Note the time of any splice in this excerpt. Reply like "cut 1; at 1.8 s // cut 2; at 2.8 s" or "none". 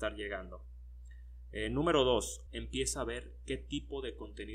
cut 1; at 2.5 s